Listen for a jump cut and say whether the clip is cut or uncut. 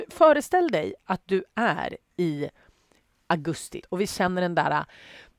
cut